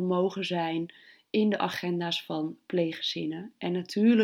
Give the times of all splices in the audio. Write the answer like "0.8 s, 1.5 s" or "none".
none